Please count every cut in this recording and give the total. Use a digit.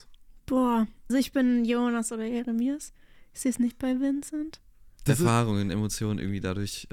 2